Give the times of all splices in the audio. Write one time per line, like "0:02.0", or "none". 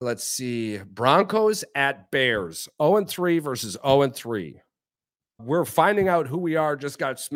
none